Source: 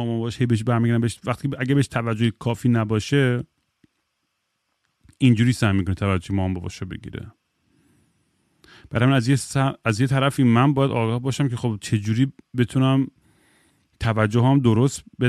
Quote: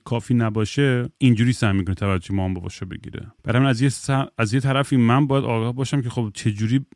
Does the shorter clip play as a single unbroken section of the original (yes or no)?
no